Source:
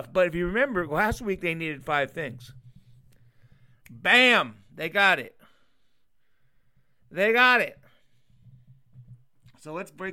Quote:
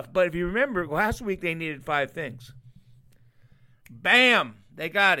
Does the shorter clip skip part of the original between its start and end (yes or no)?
no